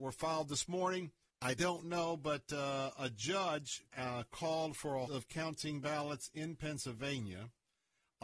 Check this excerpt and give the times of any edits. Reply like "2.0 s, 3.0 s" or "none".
1.3 s, 3.9 s, 5.1 s